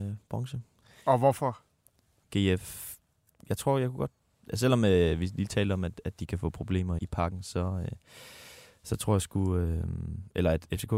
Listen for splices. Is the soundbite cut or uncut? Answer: cut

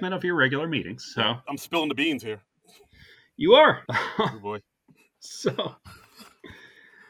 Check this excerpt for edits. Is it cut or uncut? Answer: cut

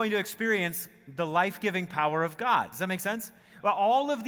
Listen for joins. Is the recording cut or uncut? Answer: uncut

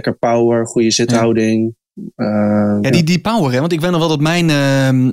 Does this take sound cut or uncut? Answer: cut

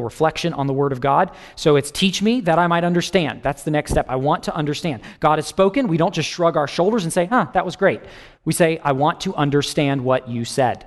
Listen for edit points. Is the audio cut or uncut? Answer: uncut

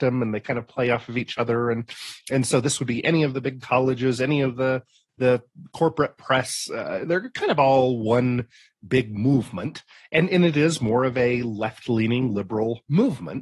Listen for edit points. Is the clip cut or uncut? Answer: uncut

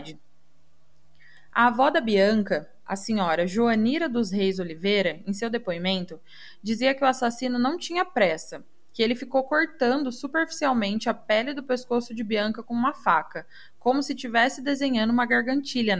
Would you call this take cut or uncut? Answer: uncut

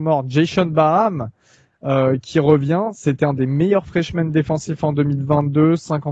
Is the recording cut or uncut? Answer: uncut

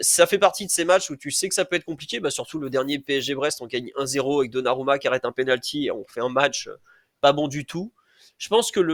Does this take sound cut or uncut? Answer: uncut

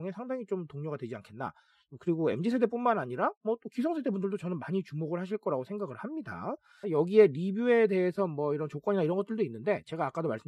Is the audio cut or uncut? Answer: cut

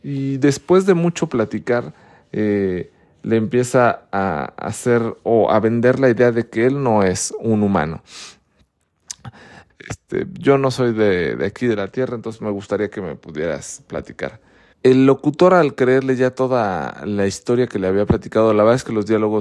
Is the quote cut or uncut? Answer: cut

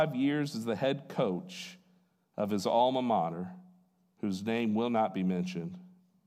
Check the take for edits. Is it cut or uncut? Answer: uncut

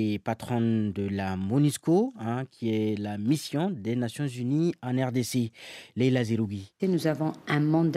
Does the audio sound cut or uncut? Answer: cut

